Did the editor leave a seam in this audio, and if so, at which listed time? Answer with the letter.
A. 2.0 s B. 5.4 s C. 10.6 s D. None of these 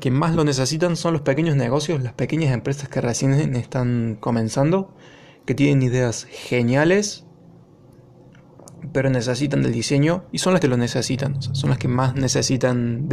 C